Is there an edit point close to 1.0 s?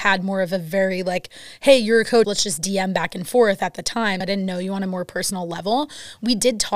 no; 2 cuts; at 2.2 s, 4.2 s

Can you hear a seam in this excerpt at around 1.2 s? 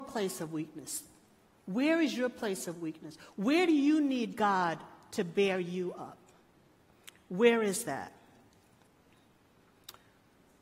no; 0 cuts

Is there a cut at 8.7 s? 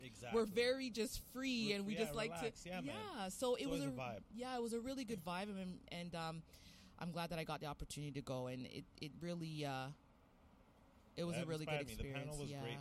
no; 0 cuts

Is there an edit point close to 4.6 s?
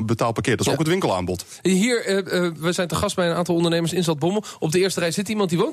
no; 0 cuts

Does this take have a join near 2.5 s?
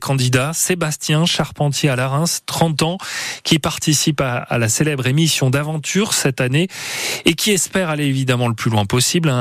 no; 0 cuts

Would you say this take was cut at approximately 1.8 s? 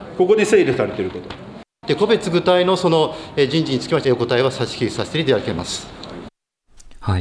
yes; 2 cuts; at 1.8 s, 4.0 s

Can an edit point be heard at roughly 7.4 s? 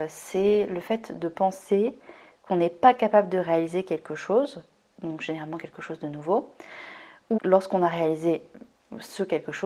yes; 1 cut; at 7.4 s

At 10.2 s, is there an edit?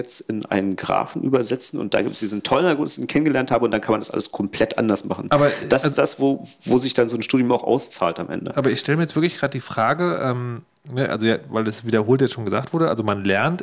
no; 0 cuts

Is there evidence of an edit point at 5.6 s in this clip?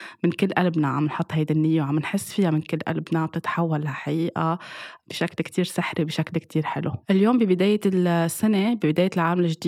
no; 1 cut; at 7.0 s

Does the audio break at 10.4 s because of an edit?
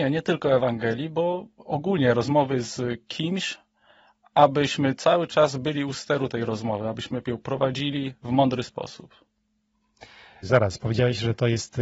yes; 1 cut; at 10.4 s

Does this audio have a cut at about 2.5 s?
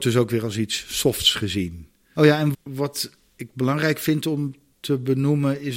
yes; 1 cut; at 2.5 s

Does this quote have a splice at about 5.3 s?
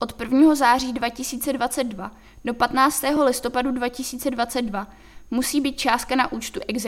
no; 1 cut; at 3.2 s

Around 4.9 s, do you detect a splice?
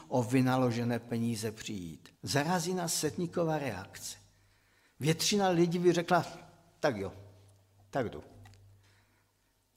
no; 1 cut; at 2.1 s

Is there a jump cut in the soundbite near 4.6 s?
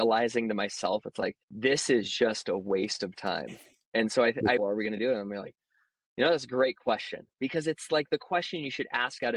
yes; 2 cuts; at 1.4 s, 4.6 s

